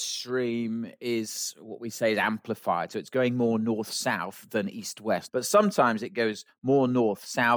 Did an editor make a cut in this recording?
yes; 1 cut; at 5.3 s

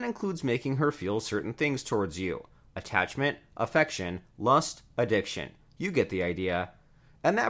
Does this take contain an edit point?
no; 0 cuts

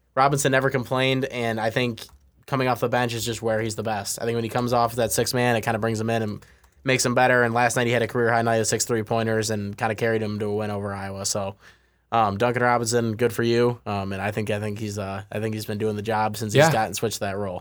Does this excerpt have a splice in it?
no; 0 cuts

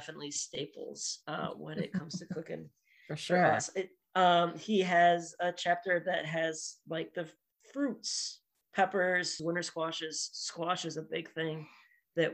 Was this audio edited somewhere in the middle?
yes; 1 cut; at 9.4 s

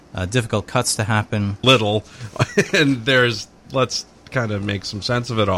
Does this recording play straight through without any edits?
no; 1 cut; at 1.6 s

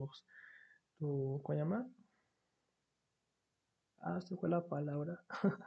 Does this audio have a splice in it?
no; 0 cuts

